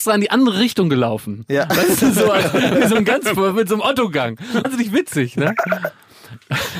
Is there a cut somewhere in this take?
yes; 1 cut; at 4.6 s

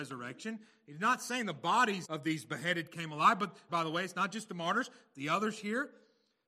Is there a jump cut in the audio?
yes; 2 cuts; at 2.0 s, 3.7 s

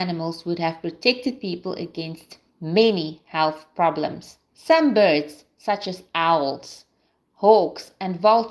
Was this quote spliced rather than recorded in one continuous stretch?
yes; 1 cut; at 4.5 s

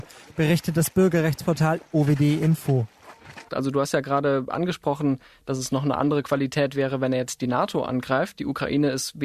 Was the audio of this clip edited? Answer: yes; 1 cut; at 3.5 s

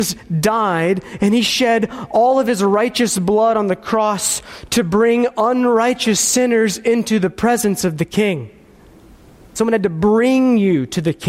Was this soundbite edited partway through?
yes; 1 cut; at 9.6 s

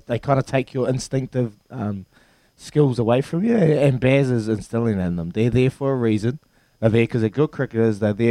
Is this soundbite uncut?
yes; 0 cuts

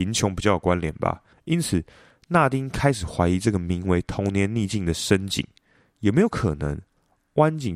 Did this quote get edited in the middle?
yes; 1 cut; at 1.3 s

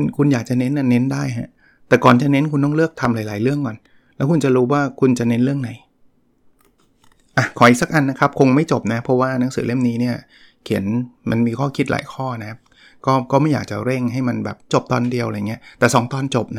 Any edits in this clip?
yes; 1 cut; at 14.7 s

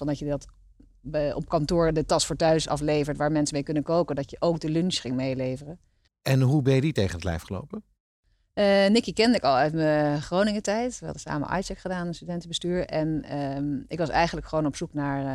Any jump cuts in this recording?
yes; 1 cut; at 6.1 s

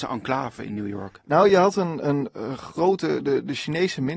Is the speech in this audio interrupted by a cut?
no; 0 cuts

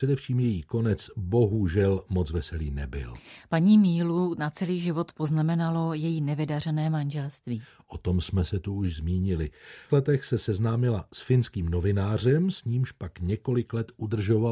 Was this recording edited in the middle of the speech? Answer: yes; 1 cut; at 9.9 s

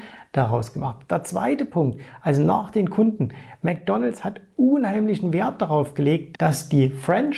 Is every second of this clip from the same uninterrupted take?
no; 1 cut; at 6.3 s

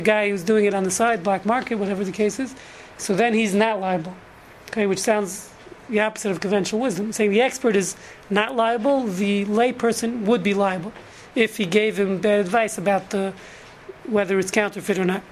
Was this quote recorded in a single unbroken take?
yes; 0 cuts

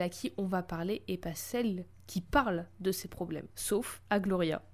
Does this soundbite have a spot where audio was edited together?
yes; 1 cut; at 3.5 s

